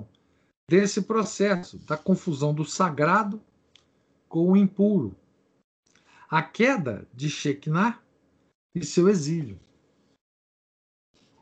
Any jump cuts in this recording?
no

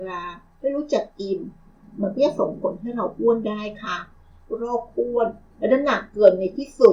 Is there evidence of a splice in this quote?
no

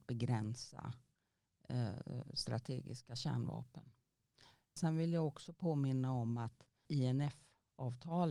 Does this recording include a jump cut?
yes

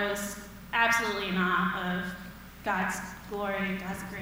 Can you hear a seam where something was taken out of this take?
no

